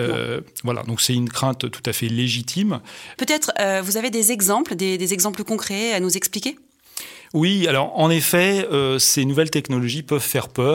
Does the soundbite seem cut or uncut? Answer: cut